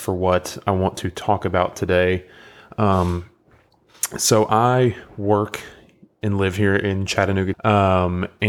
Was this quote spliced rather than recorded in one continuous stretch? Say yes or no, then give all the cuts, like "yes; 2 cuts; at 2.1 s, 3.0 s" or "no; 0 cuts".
yes; 1 cut; at 7.5 s